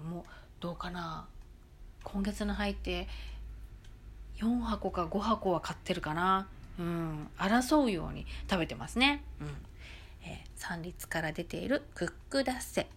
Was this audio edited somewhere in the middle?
no; 0 cuts

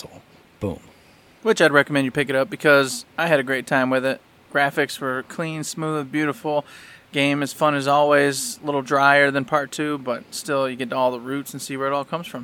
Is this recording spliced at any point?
no; 0 cuts

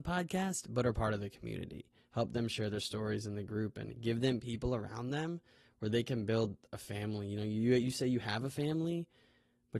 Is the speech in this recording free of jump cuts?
yes; 0 cuts

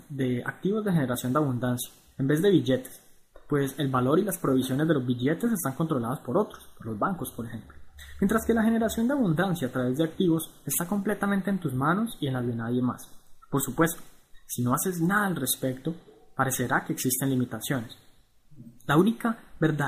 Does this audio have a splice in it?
no; 0 cuts

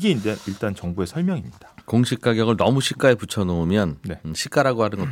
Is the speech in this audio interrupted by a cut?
yes; 1 cut; at 1.8 s

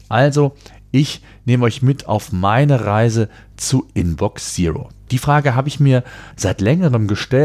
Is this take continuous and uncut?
no; 2 cuts; at 5.1 s, 6.3 s

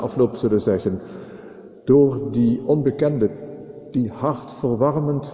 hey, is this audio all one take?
yes; 0 cuts

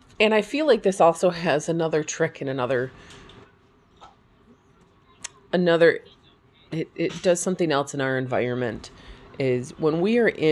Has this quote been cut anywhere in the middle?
no; 0 cuts

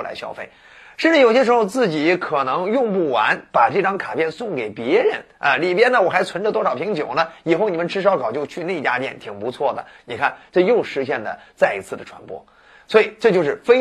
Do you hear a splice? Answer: no; 0 cuts

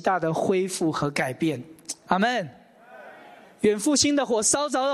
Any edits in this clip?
no; 0 cuts

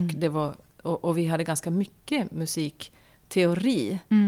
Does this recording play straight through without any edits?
yes; 0 cuts

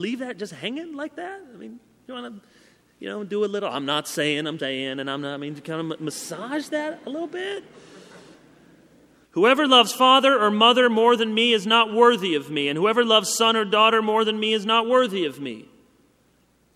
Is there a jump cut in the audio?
yes; 2 cuts; at 4.6 s, 9.2 s

